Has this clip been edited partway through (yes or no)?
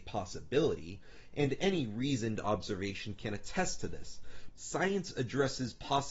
yes